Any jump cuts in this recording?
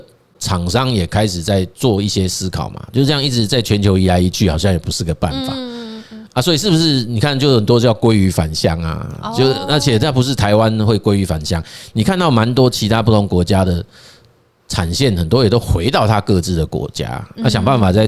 no; 0 cuts

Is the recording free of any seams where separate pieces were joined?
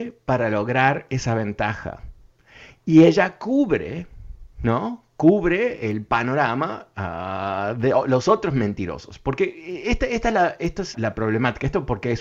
no; 1 cut; at 10.9 s

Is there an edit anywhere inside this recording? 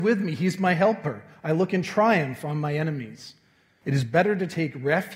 yes; 1 cut; at 3.8 s

